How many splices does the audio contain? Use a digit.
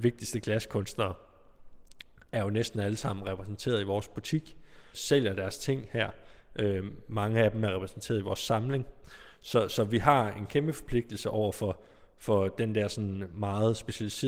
1